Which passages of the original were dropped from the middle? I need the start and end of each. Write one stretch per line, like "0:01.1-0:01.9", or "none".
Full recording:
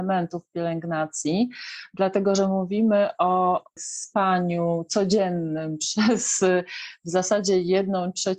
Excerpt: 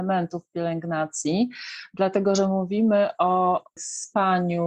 none

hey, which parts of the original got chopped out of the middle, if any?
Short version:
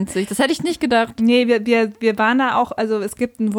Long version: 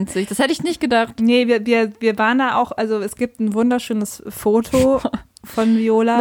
none

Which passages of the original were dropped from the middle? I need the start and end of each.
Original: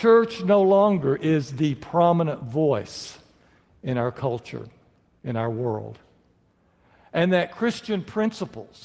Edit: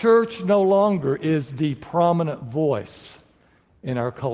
none

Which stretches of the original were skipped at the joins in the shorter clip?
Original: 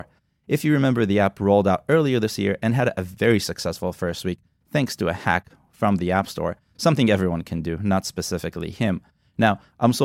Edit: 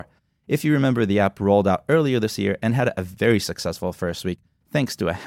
none

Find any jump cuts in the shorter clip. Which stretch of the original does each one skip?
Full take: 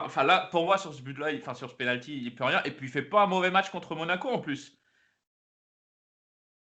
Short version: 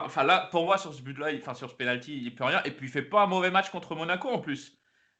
none

